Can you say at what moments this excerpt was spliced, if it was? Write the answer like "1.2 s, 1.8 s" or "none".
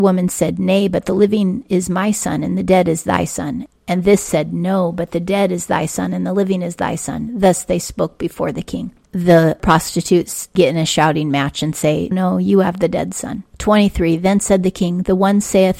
9.0 s, 12.1 s, 13.5 s